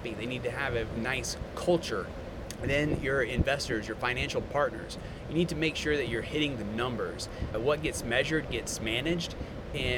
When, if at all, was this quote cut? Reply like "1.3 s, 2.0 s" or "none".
1.0 s